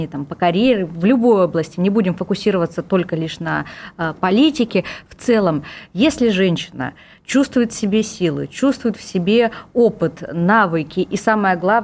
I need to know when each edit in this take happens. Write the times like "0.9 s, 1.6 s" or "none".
none